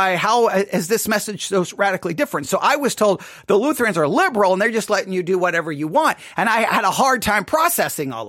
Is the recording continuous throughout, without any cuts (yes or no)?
yes